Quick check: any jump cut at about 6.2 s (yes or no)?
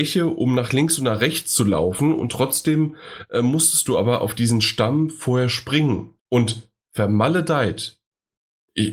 yes